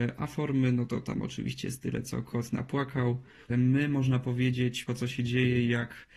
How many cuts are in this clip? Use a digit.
2